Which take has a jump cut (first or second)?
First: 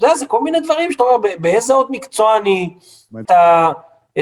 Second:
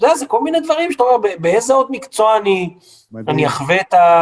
first